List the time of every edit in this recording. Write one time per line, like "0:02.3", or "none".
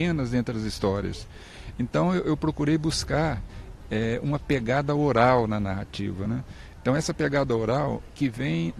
none